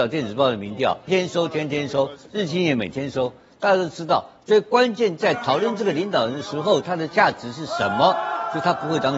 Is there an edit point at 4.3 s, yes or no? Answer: no